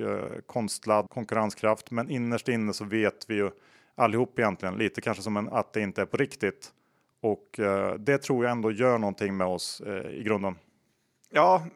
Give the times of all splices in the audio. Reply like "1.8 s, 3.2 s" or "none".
1.1 s, 5.5 s